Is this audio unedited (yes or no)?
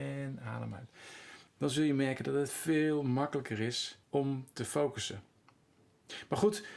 no